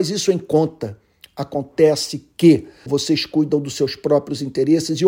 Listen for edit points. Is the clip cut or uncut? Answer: cut